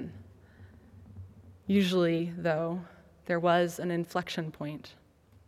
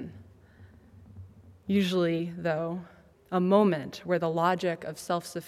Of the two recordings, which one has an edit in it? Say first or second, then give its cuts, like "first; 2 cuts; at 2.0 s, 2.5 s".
second; 1 cut; at 3.1 s